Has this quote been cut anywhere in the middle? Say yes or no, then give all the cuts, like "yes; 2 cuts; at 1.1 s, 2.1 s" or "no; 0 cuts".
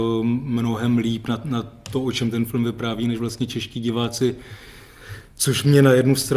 no; 0 cuts